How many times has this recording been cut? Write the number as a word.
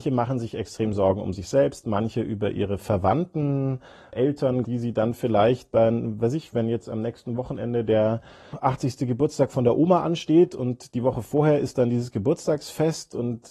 one